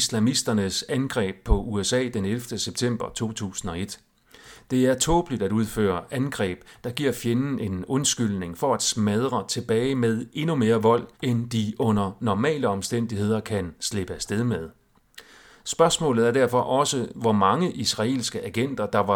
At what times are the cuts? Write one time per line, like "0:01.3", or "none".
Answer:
0:11.1